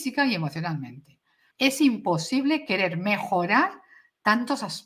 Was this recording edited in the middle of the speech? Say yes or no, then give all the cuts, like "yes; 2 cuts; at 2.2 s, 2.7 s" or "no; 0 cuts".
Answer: yes; 1 cut; at 1.5 s